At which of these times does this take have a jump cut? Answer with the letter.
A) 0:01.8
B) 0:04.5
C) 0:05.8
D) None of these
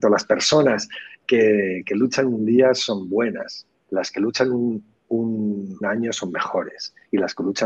C